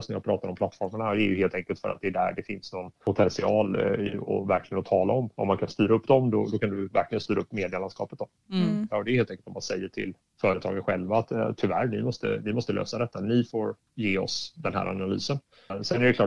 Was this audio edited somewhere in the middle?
yes; 1 cut; at 8.9 s

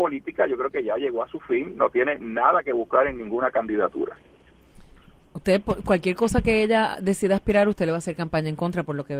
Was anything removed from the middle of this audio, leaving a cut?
no; 0 cuts

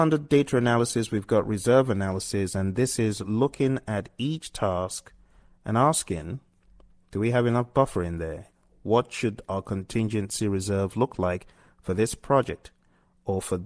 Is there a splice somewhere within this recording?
no; 0 cuts

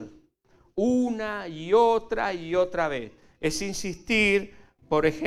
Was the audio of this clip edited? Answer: no; 0 cuts

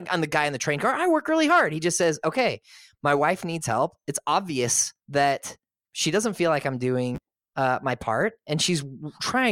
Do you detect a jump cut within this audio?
yes; 1 cut; at 5.0 s

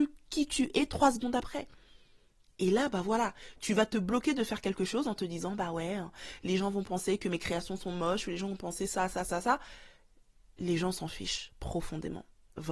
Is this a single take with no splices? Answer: yes; 0 cuts

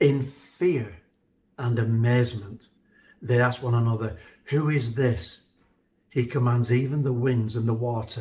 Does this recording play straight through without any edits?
yes; 0 cuts

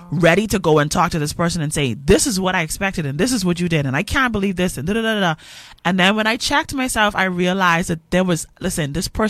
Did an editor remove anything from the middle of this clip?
no; 0 cuts

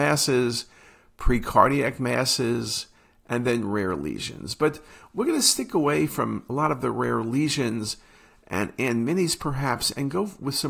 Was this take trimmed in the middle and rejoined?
no; 0 cuts

